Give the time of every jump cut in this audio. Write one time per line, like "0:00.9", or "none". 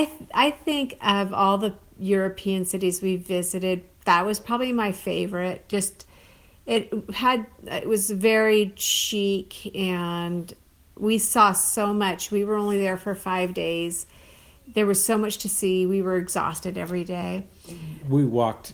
none